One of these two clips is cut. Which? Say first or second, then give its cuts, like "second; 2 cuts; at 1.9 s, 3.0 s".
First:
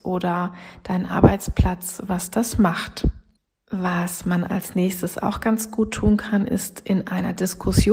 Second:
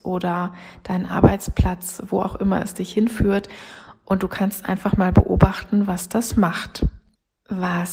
first; 1 cut; at 2.1 s